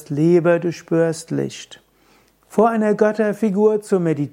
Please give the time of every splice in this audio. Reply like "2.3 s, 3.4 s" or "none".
none